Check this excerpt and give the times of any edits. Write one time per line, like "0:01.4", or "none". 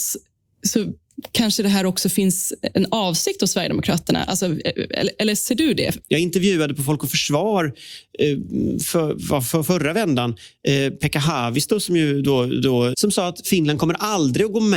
0:06.0
0:12.9